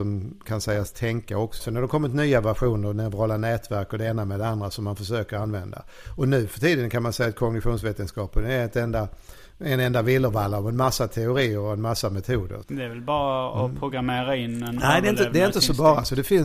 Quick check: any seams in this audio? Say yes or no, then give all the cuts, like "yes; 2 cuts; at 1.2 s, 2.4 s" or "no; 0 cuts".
yes; 2 cuts; at 1.6 s, 12.6 s